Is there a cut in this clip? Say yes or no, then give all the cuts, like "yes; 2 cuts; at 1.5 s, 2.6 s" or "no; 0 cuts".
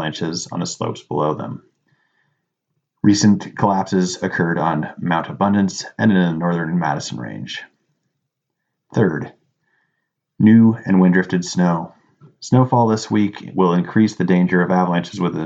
no; 0 cuts